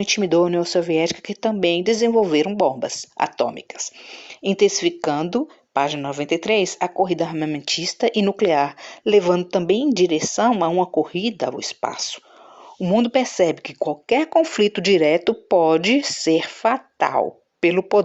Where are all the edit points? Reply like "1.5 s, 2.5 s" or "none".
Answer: none